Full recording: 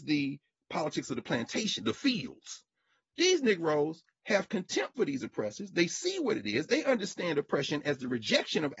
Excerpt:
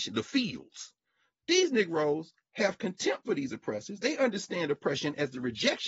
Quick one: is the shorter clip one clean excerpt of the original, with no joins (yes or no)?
no